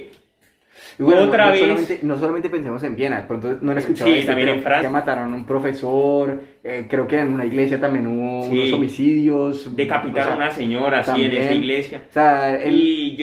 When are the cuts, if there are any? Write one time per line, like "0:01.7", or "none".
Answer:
0:04.8